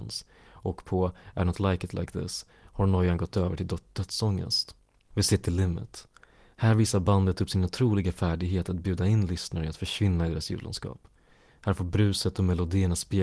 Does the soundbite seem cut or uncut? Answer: cut